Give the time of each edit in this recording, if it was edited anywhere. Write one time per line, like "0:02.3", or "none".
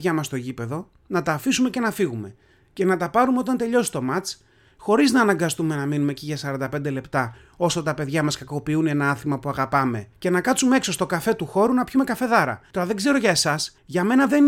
none